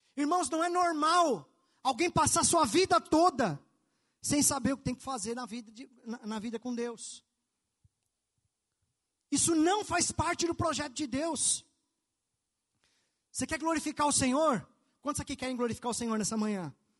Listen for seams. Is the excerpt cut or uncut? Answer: uncut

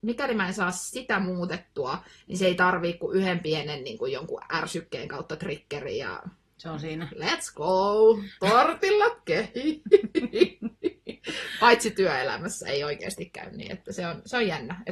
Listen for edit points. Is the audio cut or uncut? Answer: uncut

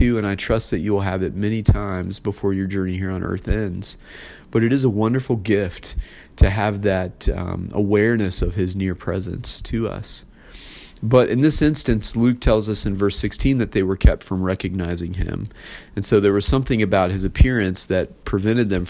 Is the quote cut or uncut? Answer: uncut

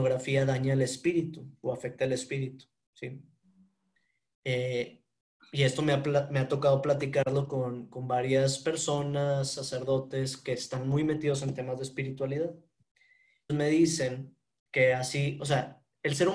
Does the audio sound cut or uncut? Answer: cut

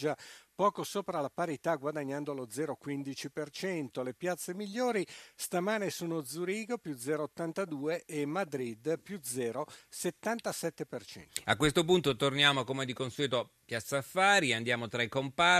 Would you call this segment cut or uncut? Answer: uncut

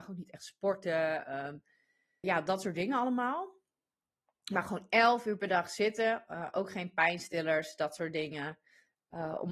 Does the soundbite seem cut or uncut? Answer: cut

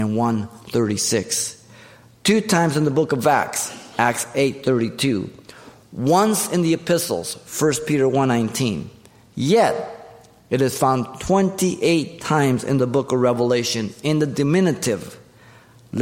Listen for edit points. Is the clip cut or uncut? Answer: uncut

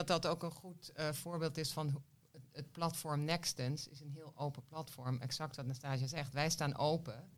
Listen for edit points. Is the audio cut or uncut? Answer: uncut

